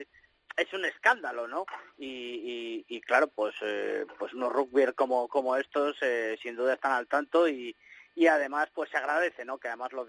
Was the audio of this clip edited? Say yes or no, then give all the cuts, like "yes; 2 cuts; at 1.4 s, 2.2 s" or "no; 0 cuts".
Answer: no; 0 cuts